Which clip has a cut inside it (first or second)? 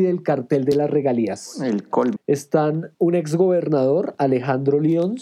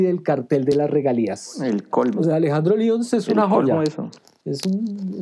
first